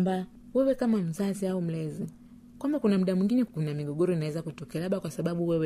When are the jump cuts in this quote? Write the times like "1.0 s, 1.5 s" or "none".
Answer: 3.5 s